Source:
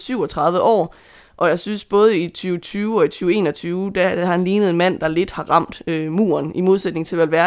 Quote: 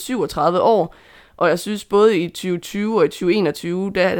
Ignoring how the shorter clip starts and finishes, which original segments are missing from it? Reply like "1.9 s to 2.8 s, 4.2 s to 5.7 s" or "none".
none